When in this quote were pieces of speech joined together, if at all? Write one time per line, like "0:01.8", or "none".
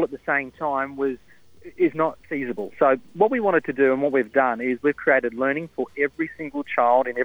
0:02.2